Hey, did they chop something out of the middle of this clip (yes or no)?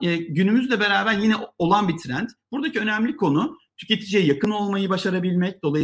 no